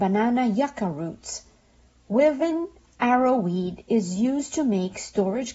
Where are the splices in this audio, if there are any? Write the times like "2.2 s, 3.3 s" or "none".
none